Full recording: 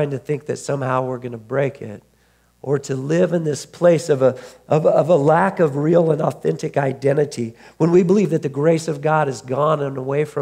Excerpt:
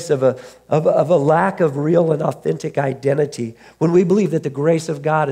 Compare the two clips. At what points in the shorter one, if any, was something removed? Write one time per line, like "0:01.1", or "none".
none